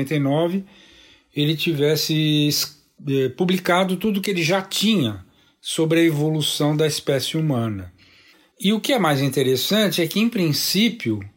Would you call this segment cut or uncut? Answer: cut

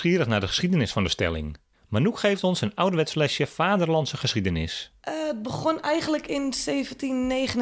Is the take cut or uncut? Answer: uncut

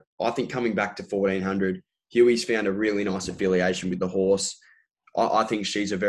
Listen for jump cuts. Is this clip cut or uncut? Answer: uncut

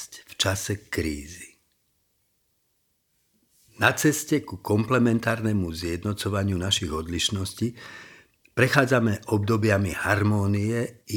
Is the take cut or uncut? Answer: uncut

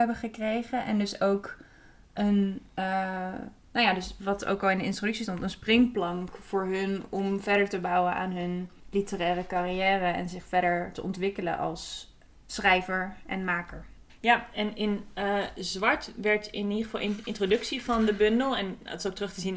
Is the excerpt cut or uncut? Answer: uncut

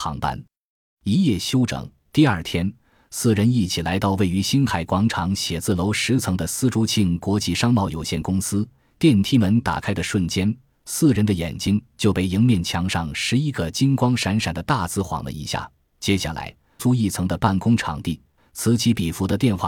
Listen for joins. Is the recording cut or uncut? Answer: cut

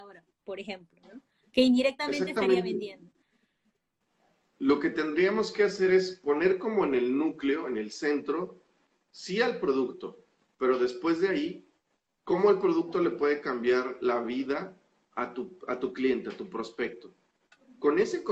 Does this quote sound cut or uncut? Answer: uncut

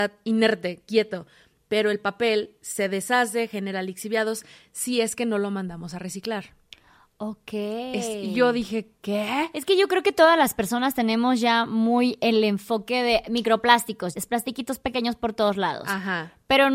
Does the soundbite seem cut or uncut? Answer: cut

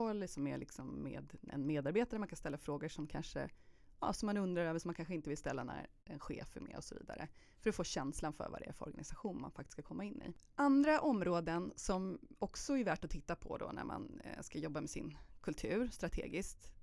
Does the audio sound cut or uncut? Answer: uncut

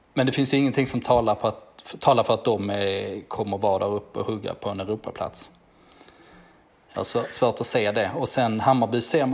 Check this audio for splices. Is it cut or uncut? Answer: uncut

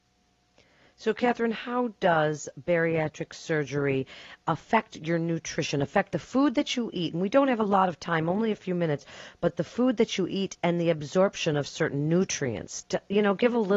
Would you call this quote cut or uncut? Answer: uncut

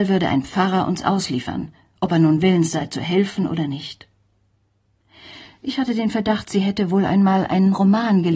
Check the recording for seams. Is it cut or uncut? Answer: uncut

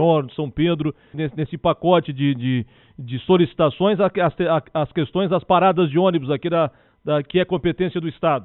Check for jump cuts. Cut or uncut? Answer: cut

